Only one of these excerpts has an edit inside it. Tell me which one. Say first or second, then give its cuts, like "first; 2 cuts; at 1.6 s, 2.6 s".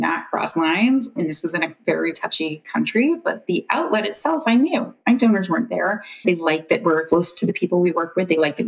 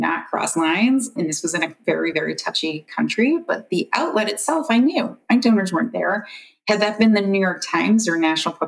first; 2 cuts; at 2.1 s, 6.2 s